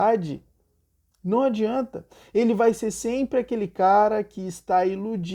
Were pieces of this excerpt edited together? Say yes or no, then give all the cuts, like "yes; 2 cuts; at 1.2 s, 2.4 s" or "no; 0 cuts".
no; 0 cuts